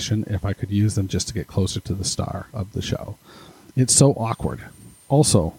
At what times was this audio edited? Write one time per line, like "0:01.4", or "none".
none